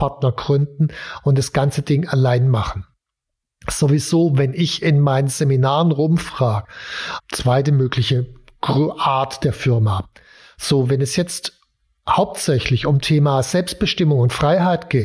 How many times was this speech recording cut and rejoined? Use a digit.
1